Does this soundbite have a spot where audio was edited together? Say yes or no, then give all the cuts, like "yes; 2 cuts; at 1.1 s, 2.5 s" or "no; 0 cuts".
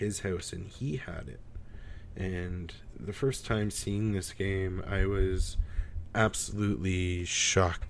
no; 0 cuts